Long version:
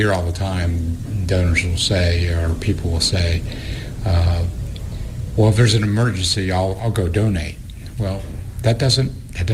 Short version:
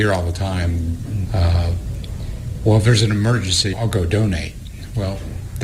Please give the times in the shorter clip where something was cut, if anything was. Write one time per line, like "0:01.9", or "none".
0:01.3
0:03.7